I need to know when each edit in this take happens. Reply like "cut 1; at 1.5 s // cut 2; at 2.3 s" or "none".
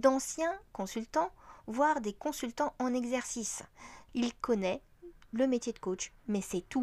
cut 1; at 4.1 s